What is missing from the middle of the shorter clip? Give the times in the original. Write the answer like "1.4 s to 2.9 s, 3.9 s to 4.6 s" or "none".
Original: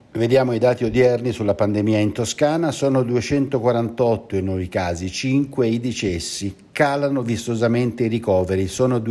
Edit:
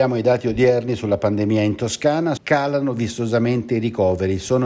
2.7 s to 6.7 s